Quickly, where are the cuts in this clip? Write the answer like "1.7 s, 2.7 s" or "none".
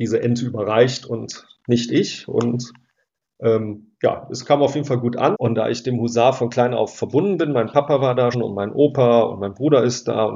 5.3 s, 8.3 s